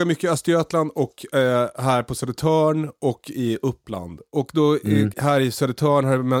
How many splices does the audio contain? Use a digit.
1